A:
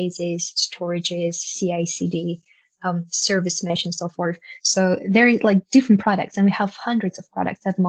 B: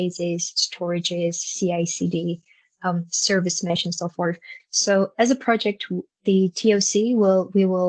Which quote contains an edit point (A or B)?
B